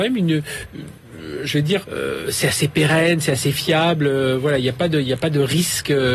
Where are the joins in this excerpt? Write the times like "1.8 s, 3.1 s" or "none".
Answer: 1.8 s